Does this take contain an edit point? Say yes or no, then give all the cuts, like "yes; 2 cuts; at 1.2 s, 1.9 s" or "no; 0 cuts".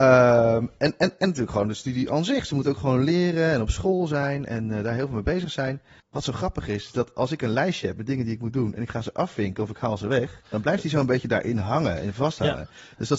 yes; 2 cuts; at 6.0 s, 10.4 s